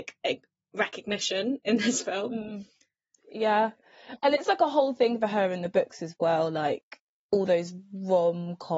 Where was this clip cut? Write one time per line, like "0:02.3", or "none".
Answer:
none